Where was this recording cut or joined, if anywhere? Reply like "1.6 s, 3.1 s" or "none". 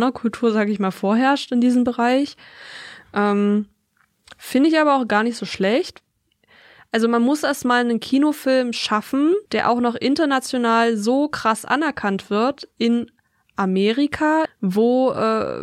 9.5 s, 14.5 s